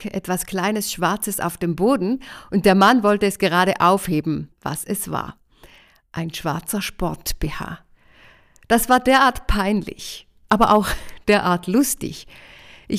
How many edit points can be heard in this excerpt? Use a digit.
1